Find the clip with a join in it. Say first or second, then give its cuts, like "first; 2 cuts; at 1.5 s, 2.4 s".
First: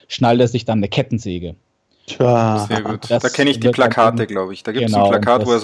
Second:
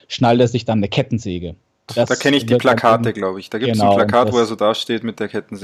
second; 1 cut; at 1.9 s